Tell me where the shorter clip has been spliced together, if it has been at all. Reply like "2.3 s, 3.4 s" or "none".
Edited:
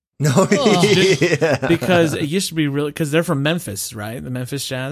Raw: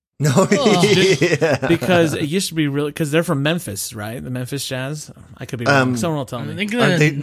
none